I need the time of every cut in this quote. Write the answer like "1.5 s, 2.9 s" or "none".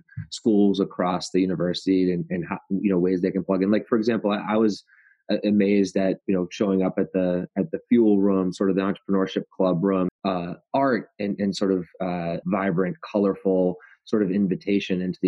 10.1 s, 12.4 s